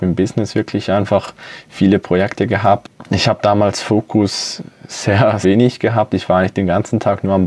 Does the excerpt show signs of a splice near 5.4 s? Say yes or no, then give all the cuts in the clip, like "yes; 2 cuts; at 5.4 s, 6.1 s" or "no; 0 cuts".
yes; 1 cut; at 5.4 s